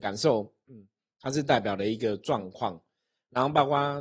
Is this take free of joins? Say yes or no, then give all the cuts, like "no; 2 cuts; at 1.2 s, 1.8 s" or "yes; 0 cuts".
yes; 0 cuts